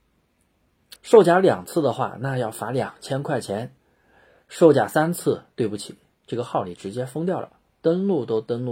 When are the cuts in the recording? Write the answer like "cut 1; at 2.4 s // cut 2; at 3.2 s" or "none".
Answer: cut 1; at 1.0 s